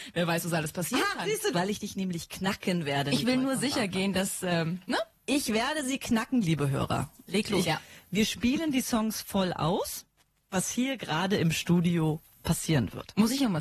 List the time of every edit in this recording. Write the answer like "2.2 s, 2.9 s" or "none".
1.5 s, 7.6 s, 10.5 s